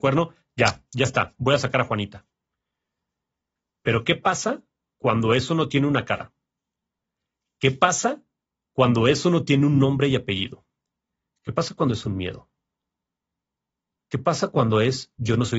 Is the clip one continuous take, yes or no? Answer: yes